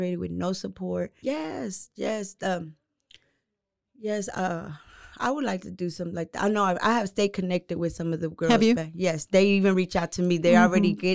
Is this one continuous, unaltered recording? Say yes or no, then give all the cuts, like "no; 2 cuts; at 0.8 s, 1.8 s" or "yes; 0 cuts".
no; 1 cut; at 1.2 s